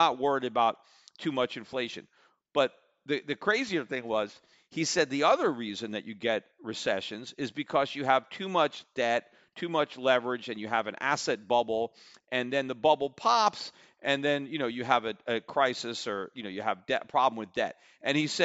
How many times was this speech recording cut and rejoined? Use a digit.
0